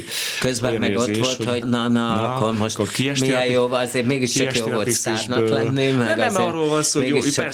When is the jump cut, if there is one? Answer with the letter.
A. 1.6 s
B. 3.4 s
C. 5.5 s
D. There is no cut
A